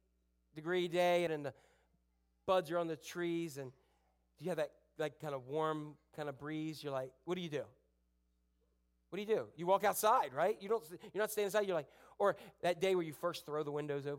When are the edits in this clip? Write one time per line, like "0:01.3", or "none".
0:01.3